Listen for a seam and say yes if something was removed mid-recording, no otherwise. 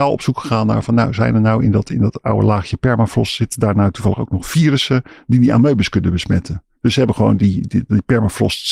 no